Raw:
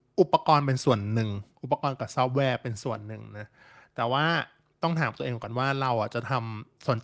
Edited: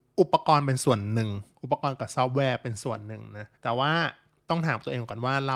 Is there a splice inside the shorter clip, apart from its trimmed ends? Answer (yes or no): yes